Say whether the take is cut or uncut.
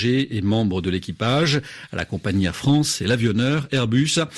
uncut